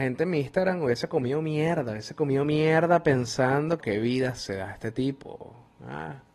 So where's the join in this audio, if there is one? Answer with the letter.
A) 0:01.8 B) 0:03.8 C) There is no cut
B